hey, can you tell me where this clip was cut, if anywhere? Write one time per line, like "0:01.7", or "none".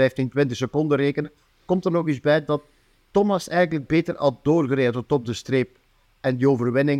none